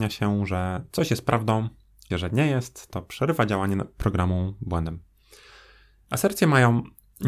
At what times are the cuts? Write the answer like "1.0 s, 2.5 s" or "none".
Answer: 2.1 s